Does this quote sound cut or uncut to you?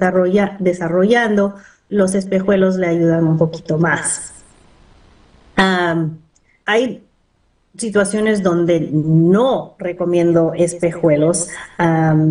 cut